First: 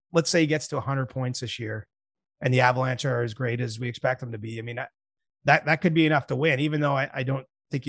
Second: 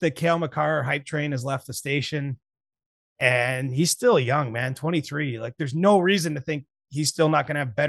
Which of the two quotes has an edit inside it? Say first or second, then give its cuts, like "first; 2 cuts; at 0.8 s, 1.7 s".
second; 1 cut; at 5.6 s